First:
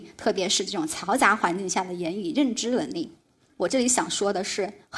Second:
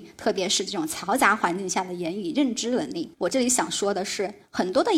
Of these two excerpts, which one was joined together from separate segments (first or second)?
second